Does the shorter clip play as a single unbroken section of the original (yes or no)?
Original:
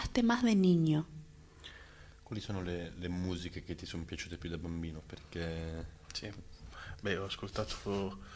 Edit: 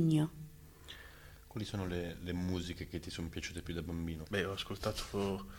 no